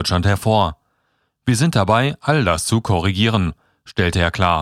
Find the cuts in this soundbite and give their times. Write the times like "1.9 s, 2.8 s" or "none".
none